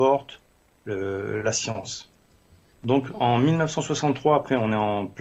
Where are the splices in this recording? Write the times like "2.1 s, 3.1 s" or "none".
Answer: 2.7 s